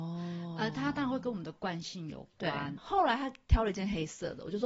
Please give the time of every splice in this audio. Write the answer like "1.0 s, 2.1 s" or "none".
2.8 s

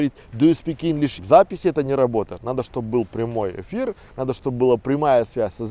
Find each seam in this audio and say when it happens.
1.2 s

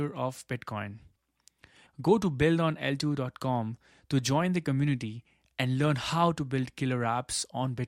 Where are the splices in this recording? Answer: 1.9 s

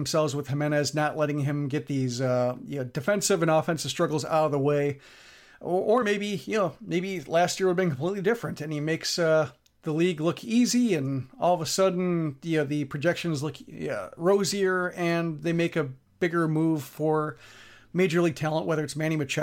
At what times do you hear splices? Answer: none

